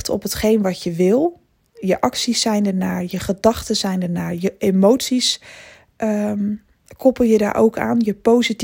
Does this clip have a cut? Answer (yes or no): no